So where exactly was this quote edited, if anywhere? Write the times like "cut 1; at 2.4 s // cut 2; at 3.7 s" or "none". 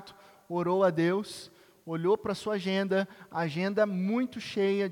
none